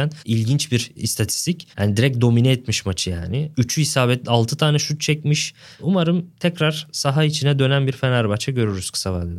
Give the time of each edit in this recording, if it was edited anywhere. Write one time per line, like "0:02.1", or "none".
0:05.7